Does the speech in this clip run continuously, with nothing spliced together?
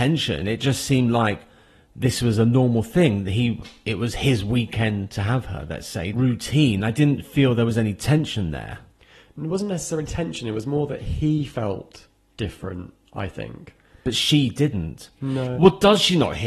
no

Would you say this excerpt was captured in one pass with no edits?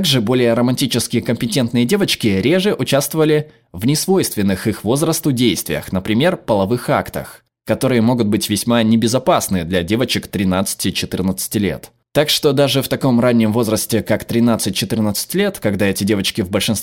yes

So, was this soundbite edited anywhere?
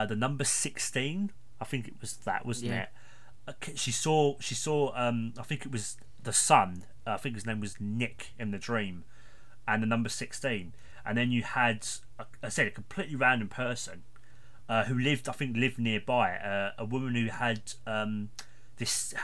no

